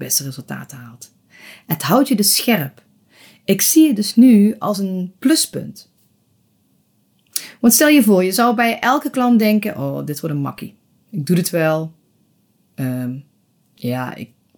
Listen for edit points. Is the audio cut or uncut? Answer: uncut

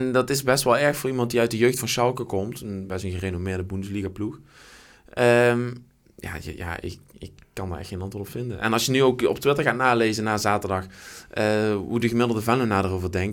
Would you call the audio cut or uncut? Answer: uncut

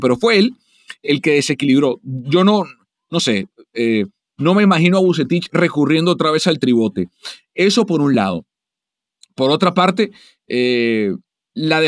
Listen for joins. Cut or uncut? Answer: uncut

